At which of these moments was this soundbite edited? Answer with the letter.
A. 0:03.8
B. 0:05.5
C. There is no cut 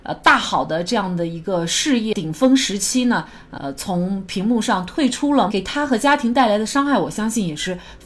B